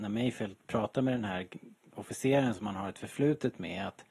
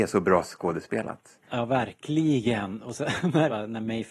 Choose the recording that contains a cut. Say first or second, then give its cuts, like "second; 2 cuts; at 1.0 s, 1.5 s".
second; 1 cut; at 1.4 s